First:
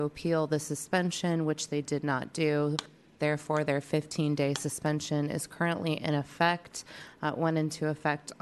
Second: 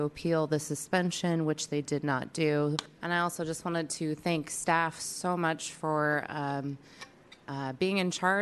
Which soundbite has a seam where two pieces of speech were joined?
second; 1 cut; at 3.0 s

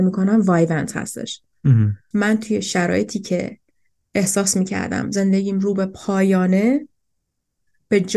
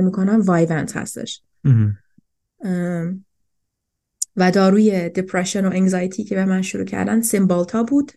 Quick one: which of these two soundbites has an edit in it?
first; 1 cut; at 2.1 s

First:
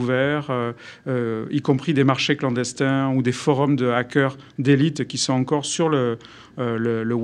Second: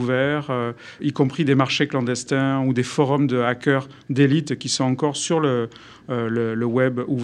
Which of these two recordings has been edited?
second; 1 cut; at 1.0 s

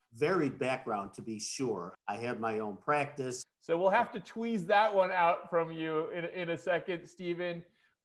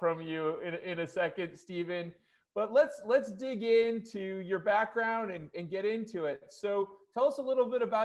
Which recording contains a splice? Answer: first; 2 cuts; at 1.9 s, 3.4 s

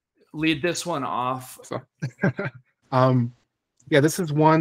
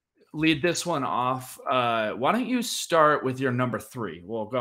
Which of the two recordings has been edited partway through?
first; 2 cuts; at 1.6 s, 2.8 s

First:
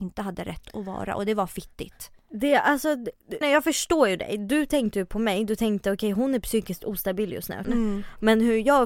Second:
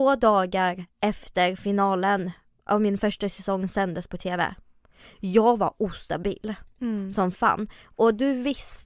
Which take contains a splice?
first; 2 cuts; at 3.4 s, 7.6 s

